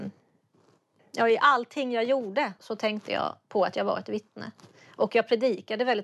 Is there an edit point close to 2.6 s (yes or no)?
yes